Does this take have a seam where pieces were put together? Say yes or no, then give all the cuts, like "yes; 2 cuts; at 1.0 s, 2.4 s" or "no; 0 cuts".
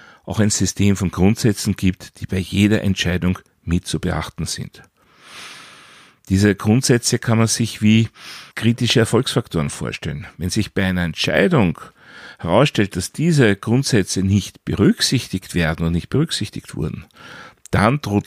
yes; 1 cut; at 8.5 s